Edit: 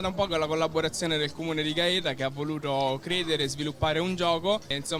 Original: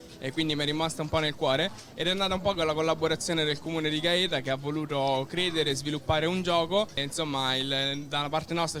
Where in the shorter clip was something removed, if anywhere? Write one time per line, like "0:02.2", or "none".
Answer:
none